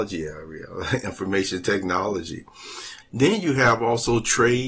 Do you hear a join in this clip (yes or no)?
yes